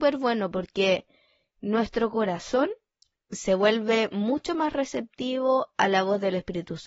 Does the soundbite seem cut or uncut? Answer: uncut